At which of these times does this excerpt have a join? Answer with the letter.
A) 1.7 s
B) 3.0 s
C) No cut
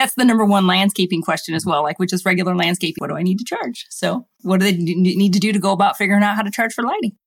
B